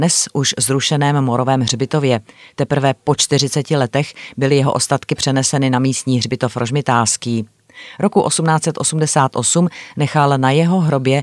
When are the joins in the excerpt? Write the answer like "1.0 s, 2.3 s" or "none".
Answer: none